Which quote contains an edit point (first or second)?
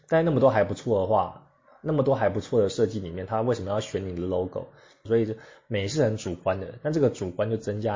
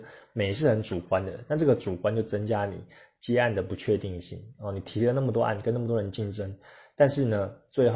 first